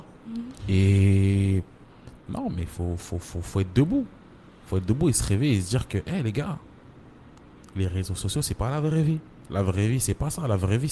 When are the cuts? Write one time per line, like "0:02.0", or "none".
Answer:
none

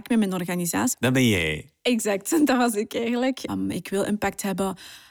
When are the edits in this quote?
0:00.9
0:03.5

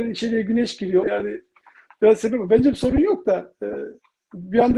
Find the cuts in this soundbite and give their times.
0:01.0

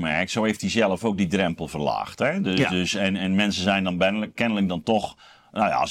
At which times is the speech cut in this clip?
none

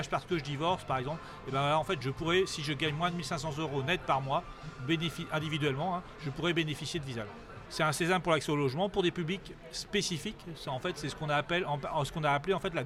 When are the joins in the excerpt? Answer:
0:07.7

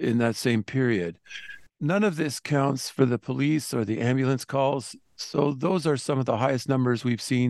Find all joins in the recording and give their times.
0:01.7

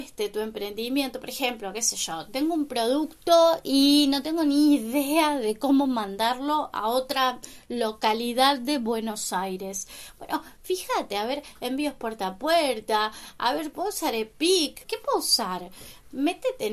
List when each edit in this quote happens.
0:13.7
0:14.8

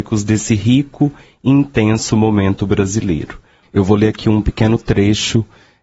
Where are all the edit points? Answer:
0:03.6

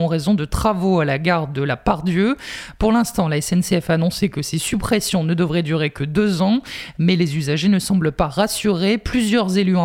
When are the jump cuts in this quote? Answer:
none

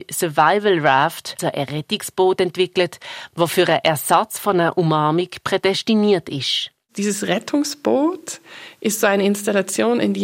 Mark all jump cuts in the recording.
0:01.4

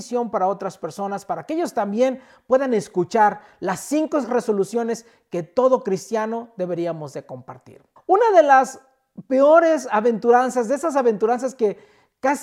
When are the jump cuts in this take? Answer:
0:08.0

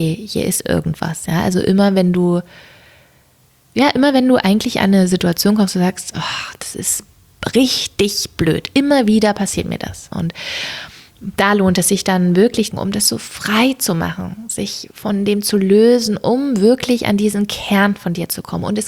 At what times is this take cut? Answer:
0:10.1
0:12.7

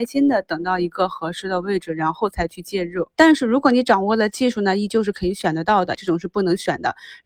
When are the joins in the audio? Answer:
0:03.1
0:05.9

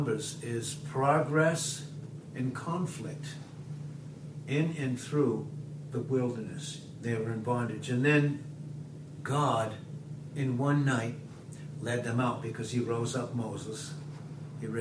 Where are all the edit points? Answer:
0:07.0

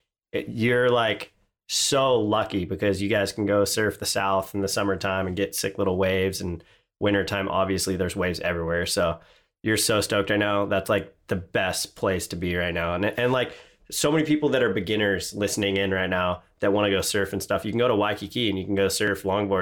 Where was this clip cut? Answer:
none

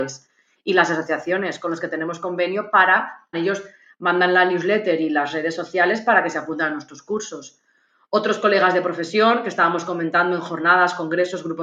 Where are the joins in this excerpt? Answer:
0:03.3

